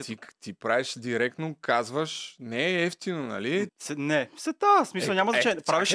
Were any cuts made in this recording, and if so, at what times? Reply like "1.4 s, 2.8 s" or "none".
3.7 s